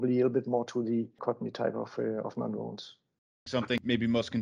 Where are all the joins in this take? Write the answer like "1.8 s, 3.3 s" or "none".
3.5 s